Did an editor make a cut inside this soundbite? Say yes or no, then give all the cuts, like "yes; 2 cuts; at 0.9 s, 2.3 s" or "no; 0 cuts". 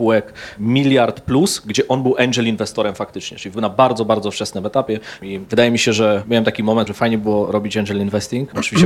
yes; 2 cuts; at 5.2 s, 6.9 s